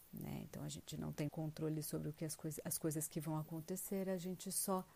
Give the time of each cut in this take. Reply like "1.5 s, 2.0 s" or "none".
1.3 s